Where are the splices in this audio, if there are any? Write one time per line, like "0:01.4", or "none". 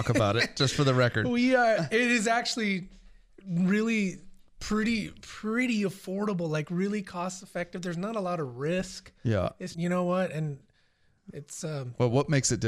0:09.7